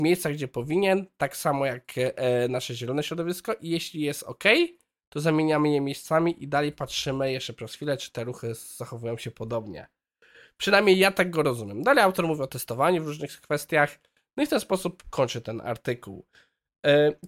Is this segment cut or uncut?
uncut